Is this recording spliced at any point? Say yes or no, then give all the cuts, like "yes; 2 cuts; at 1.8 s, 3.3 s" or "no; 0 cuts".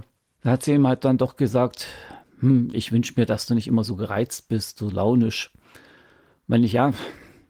no; 0 cuts